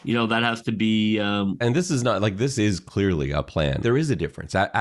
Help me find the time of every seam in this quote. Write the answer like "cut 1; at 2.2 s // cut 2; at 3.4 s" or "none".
cut 1; at 1.6 s // cut 2; at 3.8 s